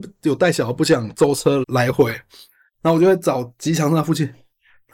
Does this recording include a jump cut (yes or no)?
yes